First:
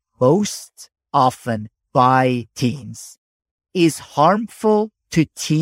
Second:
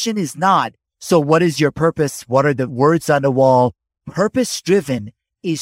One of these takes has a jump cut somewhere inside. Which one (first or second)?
second